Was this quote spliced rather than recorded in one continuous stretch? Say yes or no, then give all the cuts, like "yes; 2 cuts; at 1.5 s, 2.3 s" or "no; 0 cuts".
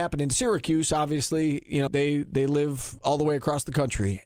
yes; 1 cut; at 1.9 s